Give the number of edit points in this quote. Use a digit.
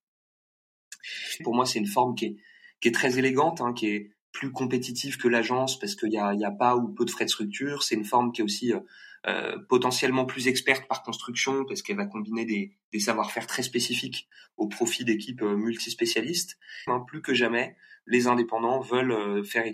2